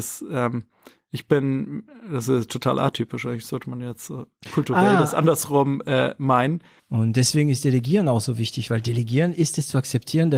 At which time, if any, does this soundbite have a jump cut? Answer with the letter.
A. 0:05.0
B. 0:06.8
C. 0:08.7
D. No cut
B